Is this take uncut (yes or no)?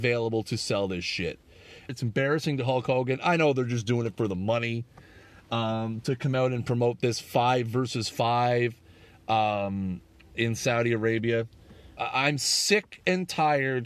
no